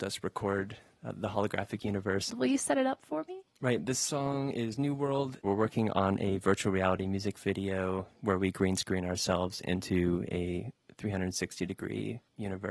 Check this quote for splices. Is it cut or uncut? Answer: cut